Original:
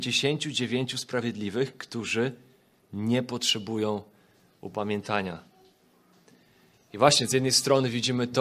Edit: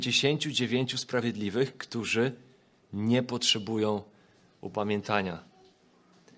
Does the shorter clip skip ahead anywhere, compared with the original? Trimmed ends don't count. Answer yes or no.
no